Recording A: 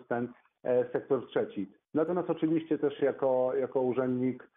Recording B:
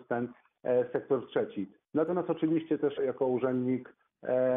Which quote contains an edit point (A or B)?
B